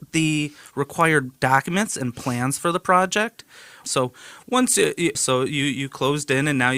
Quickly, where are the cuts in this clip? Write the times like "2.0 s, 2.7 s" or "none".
3.8 s, 5.1 s